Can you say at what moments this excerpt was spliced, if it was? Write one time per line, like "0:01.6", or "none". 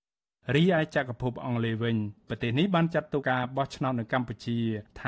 0:03.2